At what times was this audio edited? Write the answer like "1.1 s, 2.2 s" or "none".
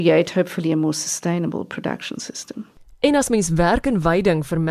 none